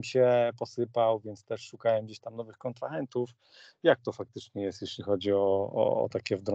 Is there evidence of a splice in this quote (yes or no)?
no